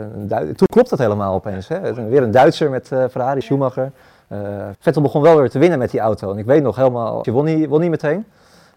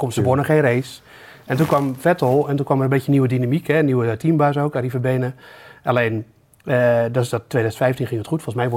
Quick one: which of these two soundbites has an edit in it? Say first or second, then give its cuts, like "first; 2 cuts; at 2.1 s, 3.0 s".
first; 3 cuts; at 3.4 s, 4.7 s, 7.2 s